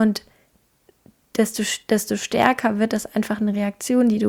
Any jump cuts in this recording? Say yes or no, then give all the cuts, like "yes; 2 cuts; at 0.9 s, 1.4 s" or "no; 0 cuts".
no; 0 cuts